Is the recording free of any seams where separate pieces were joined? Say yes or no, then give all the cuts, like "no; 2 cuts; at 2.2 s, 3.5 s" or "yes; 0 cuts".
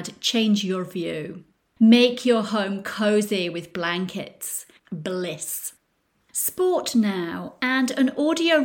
no; 1 cut; at 4.8 s